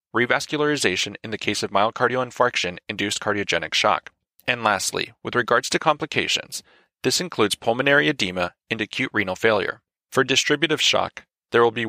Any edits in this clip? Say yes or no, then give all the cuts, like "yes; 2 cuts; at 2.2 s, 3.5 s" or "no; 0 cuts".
yes; 2 cuts; at 4.4 s, 10.0 s